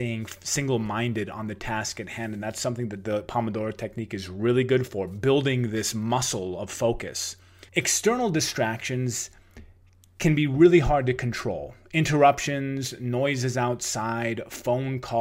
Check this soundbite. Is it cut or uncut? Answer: cut